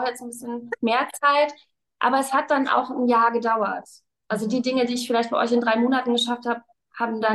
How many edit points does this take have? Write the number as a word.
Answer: zero